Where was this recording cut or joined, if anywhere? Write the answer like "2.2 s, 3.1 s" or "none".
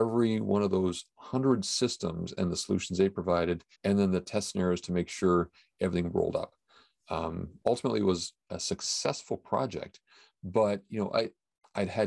3.7 s